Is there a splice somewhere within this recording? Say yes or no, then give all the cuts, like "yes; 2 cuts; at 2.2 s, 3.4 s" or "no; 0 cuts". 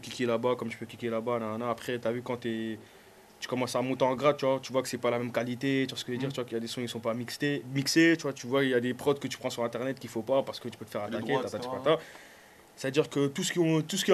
no; 0 cuts